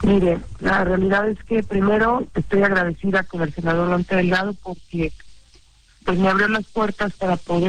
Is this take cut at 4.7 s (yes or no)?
no